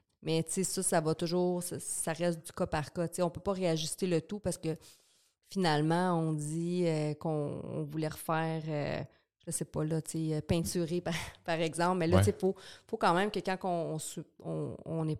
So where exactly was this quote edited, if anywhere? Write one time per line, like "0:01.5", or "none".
none